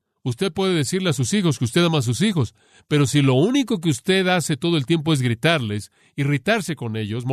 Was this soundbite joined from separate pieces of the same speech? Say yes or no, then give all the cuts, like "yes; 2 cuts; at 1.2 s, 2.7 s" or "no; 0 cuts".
no; 0 cuts